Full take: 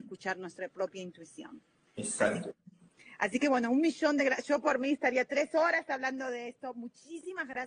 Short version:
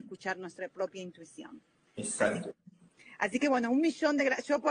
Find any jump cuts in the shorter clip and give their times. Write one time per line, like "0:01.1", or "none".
none